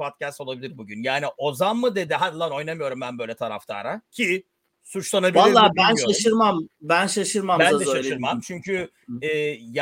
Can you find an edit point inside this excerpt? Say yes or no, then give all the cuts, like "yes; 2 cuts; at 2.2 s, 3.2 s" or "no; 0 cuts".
no; 0 cuts